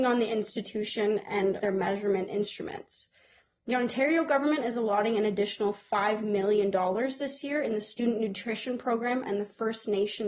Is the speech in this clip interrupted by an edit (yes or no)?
yes